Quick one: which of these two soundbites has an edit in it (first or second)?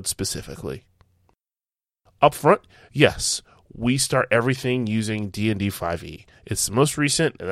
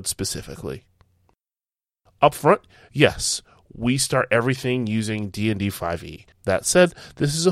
second